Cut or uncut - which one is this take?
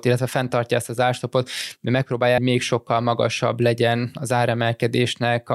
cut